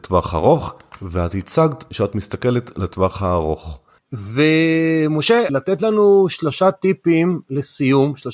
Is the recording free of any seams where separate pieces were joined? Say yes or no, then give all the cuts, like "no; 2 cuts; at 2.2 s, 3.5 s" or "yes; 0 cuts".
no; 2 cuts; at 4.0 s, 5.5 s